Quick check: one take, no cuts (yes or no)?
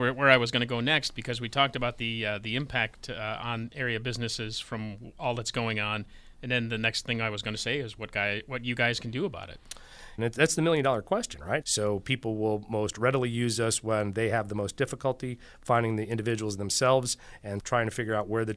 no